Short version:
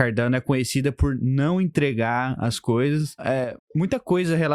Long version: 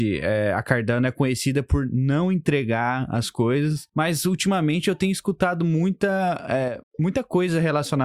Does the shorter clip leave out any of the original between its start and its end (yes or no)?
yes